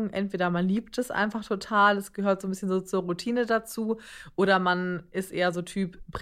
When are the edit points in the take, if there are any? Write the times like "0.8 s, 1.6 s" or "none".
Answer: none